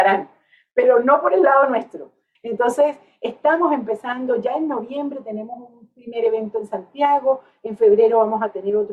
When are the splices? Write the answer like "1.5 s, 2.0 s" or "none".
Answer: 2.3 s